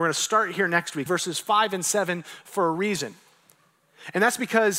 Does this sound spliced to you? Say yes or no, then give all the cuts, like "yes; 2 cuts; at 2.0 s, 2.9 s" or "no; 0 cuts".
yes; 1 cut; at 1.1 s